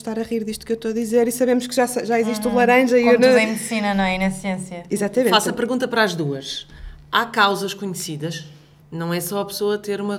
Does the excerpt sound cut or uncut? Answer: cut